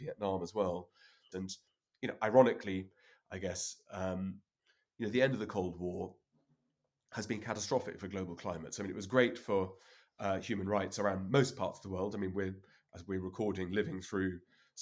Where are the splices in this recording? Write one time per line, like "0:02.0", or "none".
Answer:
0:01.3